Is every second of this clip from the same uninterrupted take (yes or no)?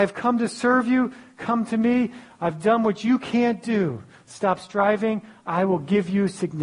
yes